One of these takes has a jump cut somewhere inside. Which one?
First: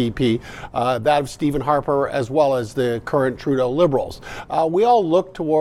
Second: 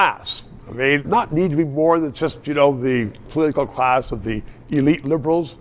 second; 1 cut; at 1.0 s

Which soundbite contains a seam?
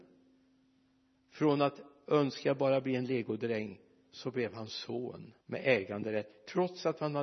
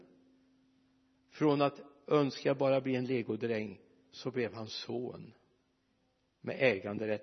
first; 1 cut; at 5.4 s

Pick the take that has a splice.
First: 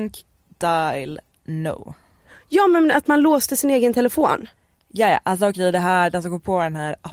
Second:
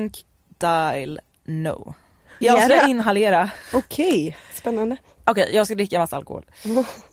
second; 1 cut; at 2.4 s

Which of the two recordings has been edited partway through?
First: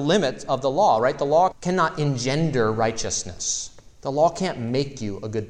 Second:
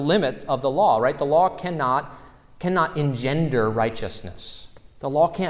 first; 1 cut; at 1.5 s

